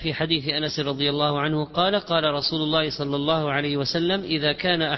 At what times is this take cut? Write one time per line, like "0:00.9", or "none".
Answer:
none